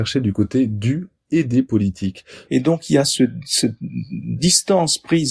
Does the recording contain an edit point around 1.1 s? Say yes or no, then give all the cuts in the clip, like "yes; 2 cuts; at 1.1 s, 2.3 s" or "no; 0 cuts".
no; 1 cut; at 2.5 s